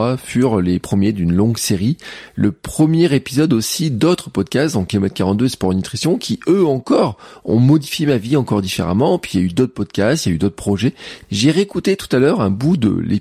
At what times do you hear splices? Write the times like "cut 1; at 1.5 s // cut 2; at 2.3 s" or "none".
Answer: cut 1; at 11.2 s